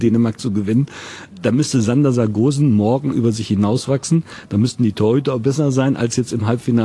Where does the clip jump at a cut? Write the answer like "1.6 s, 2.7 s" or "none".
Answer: none